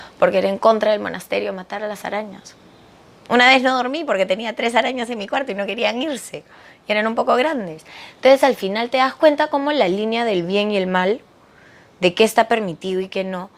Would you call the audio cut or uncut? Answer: uncut